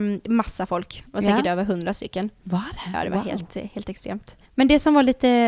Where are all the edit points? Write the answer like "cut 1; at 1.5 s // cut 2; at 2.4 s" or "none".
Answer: cut 1; at 4.5 s